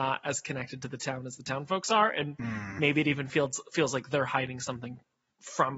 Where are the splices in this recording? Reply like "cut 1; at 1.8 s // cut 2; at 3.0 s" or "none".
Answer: none